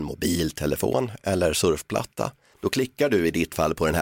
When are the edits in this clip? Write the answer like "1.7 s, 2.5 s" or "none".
2.5 s